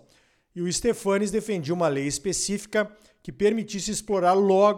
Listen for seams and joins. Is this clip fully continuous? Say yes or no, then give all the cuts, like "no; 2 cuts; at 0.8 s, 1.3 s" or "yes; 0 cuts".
yes; 0 cuts